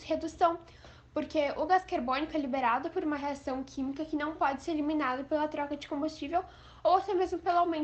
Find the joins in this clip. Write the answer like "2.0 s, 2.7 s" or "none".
none